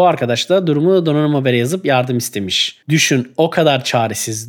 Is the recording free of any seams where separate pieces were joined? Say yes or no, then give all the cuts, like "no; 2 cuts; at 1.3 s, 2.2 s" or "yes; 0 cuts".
yes; 0 cuts